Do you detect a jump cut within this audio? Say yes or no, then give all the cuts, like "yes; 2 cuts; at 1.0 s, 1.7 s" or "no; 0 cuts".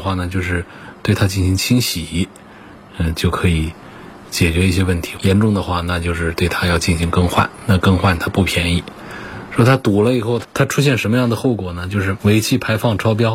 no; 0 cuts